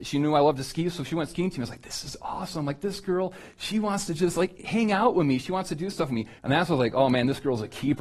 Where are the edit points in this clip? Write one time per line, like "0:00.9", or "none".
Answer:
0:06.4